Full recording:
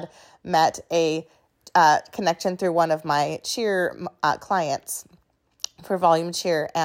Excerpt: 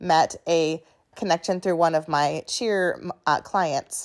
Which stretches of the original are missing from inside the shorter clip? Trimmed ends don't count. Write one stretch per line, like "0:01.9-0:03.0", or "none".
0:01.6-0:02.1

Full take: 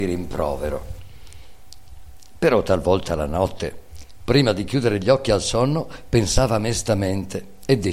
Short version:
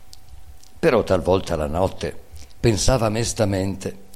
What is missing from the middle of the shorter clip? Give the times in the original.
0:04.2-0:06.1

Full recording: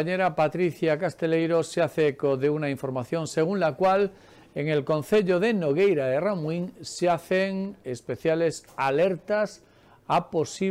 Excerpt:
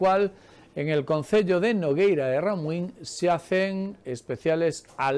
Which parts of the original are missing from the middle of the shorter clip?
none

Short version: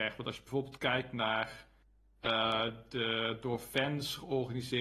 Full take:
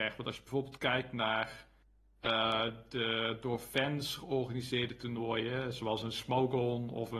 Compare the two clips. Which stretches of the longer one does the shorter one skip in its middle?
none

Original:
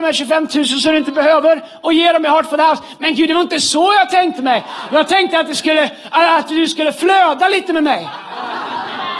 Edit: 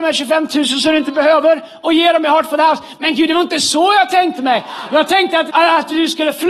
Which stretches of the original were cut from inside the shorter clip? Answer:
0:05.5-0:06.1

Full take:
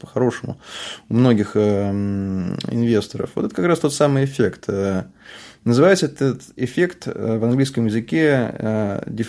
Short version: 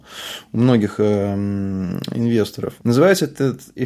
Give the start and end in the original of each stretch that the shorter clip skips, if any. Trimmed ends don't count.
0:03.3-0:05.6

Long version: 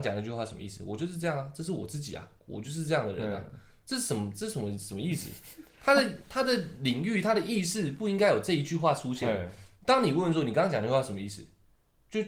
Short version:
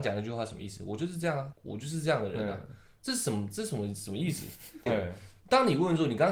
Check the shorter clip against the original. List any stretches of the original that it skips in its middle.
0:01.5-0:02.4
0:05.7-0:09.2

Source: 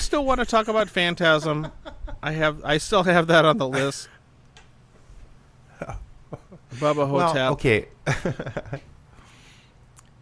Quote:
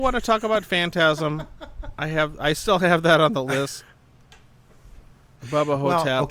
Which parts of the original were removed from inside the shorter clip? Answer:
0:05.6-0:06.6

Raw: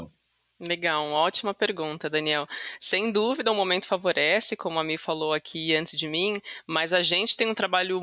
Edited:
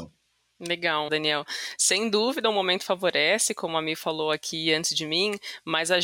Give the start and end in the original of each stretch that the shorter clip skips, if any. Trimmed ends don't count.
0:01.1-0:02.1

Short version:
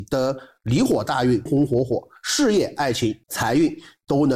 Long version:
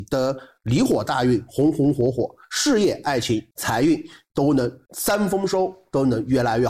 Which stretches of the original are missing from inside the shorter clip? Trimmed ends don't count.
0:01.5-0:01.7

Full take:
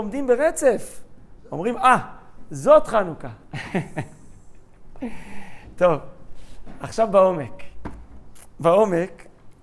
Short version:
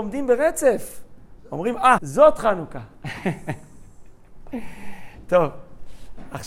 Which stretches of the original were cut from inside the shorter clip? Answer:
0:02.0-0:02.5

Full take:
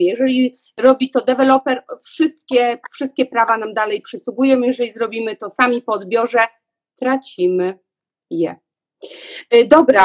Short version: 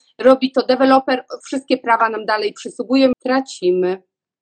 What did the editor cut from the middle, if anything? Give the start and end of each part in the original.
0:02.0-0:02.9
0:04.6-0:06.9

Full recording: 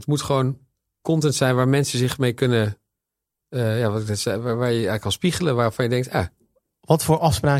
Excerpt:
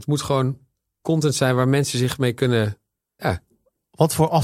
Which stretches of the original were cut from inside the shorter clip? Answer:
0:03.2-0:06.1

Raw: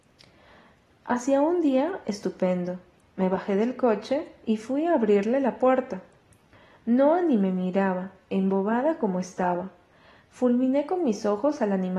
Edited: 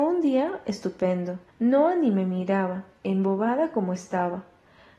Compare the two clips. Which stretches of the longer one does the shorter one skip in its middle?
0:02.9-0:06.7

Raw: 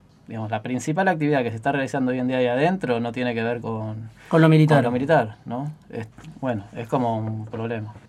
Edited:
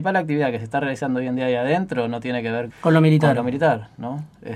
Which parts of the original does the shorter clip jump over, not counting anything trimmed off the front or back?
0:03.6-0:04.2

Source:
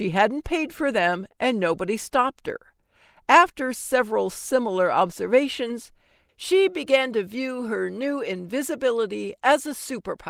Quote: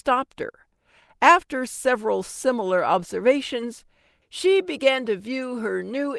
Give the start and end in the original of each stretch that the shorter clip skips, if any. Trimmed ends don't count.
none

